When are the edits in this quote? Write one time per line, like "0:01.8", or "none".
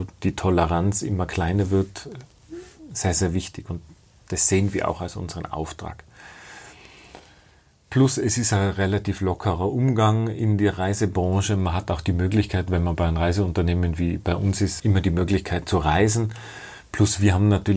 0:14.8